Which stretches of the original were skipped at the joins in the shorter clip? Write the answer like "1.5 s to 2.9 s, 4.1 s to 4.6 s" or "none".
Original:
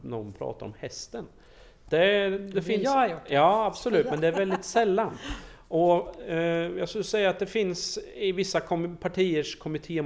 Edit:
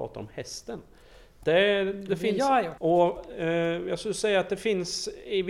3.2 s to 5.7 s